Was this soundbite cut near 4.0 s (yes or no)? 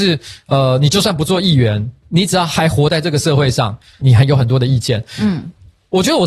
yes